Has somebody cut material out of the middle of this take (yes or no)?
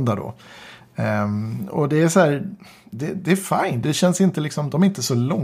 yes